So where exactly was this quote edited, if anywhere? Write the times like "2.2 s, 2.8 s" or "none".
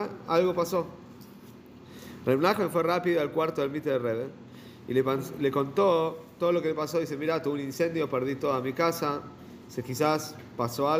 none